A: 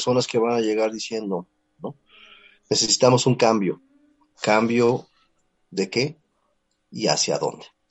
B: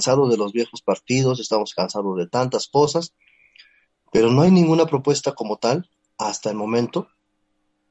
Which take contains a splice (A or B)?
A